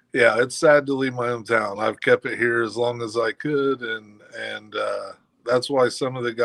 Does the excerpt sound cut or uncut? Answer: uncut